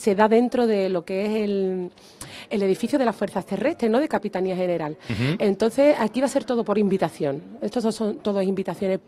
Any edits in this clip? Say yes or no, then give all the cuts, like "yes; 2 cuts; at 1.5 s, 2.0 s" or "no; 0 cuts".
no; 0 cuts